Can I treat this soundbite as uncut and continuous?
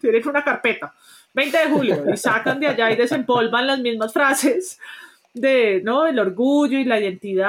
yes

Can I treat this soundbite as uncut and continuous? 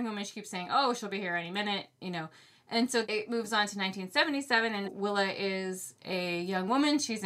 no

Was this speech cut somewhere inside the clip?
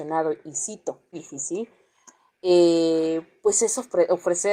yes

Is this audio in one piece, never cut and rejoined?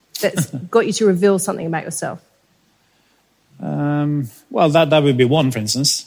yes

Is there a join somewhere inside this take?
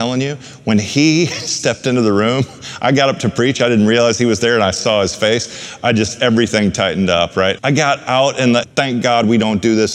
yes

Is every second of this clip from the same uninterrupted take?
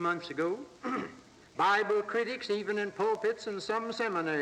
no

